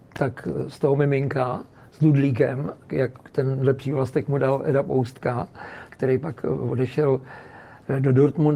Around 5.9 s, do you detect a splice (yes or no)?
yes